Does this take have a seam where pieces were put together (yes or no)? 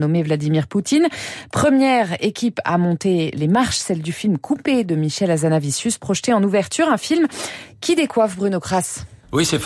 no